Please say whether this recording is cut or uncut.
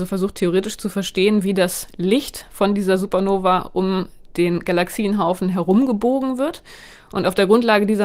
uncut